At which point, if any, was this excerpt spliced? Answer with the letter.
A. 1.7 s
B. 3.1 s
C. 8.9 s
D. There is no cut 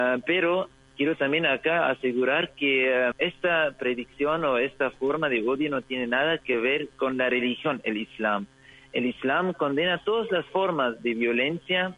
B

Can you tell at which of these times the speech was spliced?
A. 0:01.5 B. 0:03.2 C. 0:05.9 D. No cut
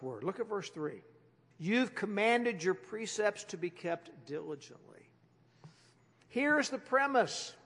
A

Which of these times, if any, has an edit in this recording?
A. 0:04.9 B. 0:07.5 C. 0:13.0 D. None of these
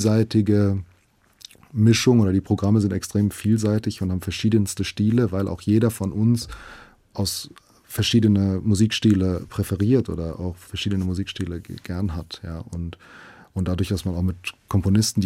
D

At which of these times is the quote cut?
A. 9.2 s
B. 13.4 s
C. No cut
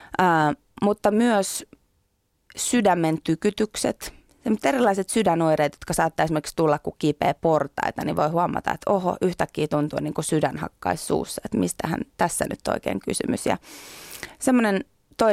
C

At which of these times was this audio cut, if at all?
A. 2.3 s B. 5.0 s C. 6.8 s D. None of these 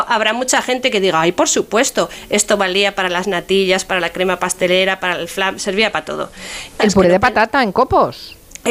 C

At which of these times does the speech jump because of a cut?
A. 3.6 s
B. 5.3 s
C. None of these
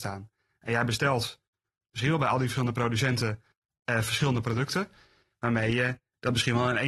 B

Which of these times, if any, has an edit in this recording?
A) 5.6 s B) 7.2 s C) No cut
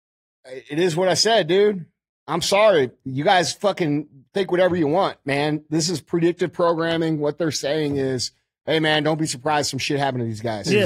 C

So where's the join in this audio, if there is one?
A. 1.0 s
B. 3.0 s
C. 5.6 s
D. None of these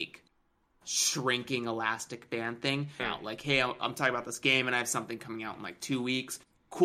B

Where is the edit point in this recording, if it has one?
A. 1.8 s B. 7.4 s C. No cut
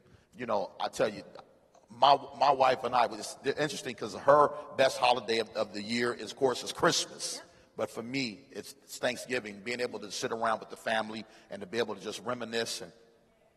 C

